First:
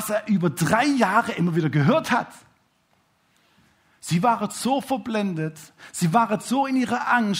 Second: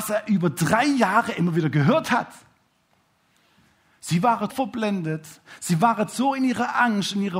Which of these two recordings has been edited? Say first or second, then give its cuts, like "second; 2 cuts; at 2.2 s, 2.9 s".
second; 1 cut; at 4.5 s